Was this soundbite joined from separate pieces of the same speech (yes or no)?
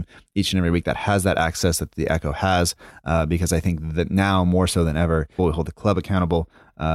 yes